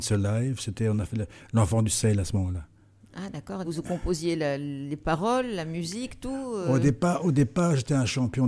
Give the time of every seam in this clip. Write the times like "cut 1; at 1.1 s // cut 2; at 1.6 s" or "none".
cut 1; at 3.6 s

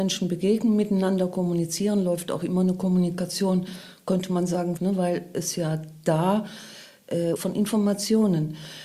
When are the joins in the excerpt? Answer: cut 1; at 4.8 s // cut 2; at 7.4 s

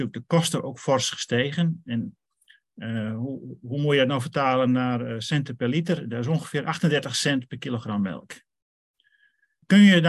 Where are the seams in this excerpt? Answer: none

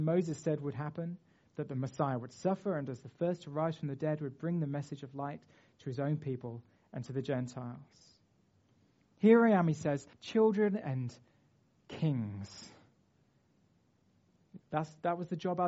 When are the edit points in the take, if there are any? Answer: cut 1; at 10.1 s // cut 2; at 14.6 s

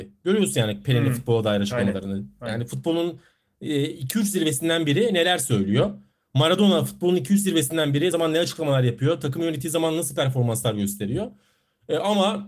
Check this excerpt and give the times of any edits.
cut 1; at 8.1 s

